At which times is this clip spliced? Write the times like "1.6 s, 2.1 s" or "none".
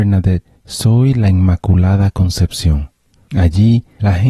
3.3 s